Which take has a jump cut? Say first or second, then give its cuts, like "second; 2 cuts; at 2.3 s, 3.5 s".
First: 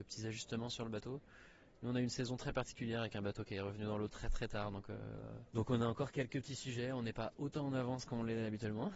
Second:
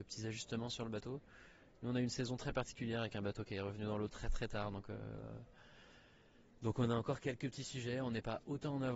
first; 1 cut; at 5.5 s